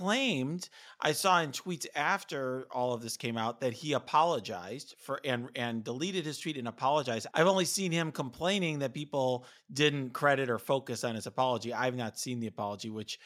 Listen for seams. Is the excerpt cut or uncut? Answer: cut